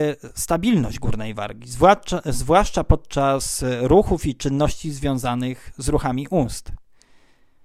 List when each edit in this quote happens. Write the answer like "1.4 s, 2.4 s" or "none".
none